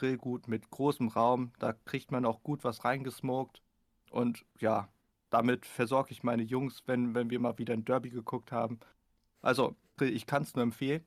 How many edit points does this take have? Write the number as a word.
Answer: one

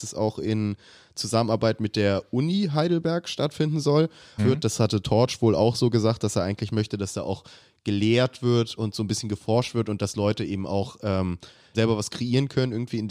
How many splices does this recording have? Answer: two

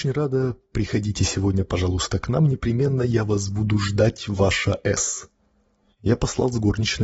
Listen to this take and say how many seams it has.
one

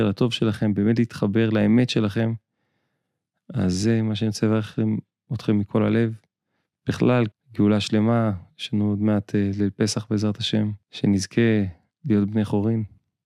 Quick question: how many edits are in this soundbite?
two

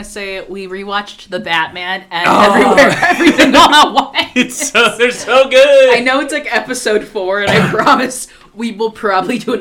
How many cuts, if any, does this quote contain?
zero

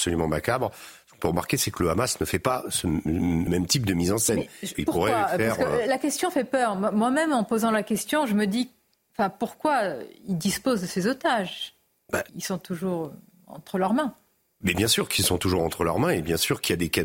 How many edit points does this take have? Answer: three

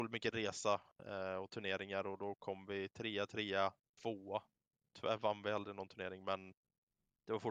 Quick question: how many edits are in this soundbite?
zero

